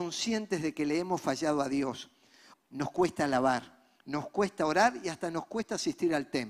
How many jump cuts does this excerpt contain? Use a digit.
2